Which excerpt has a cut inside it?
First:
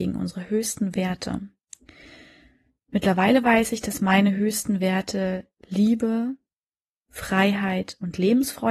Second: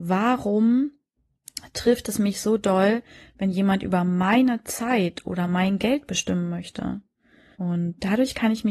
second; 1 cut; at 7.5 s

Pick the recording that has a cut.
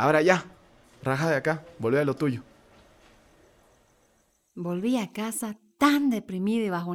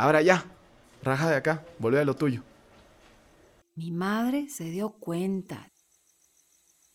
second; 1 cut; at 3.6 s

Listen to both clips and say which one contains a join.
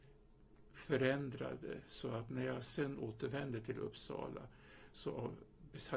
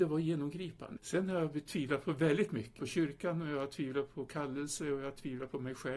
second; 2 cuts; at 1.0 s, 2.8 s

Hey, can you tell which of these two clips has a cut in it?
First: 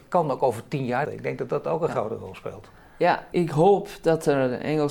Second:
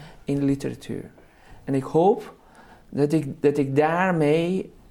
first; 2 cuts; at 1.0 s, 3.3 s

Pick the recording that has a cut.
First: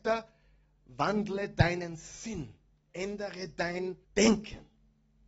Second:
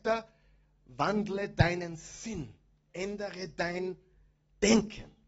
first; 1 cut; at 4.0 s

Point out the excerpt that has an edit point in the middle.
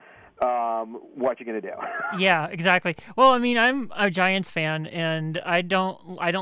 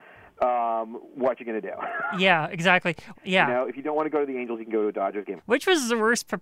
second; 2 cuts; at 3.1 s, 5.4 s

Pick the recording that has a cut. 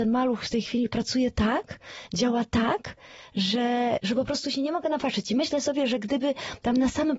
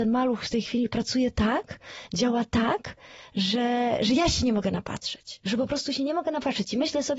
first; 1 cut; at 4.0 s

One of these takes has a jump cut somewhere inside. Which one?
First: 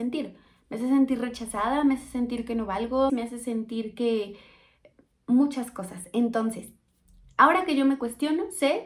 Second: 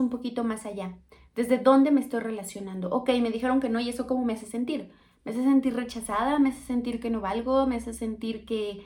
first; 1 cut; at 3.1 s

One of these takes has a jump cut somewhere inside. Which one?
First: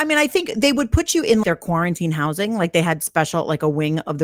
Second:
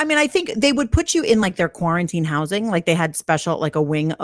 first; 1 cut; at 1.4 s

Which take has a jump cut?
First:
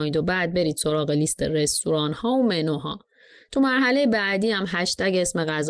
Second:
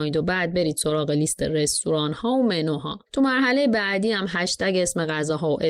second; 1 cut; at 3.1 s

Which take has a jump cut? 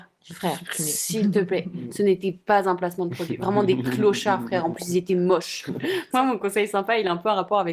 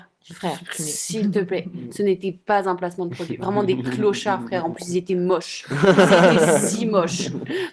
first; 1 cut; at 5.7 s

